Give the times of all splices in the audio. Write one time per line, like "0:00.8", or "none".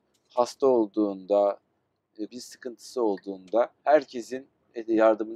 0:02.3
0:03.8